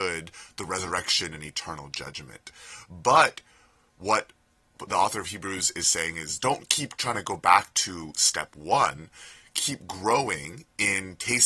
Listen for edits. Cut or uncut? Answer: uncut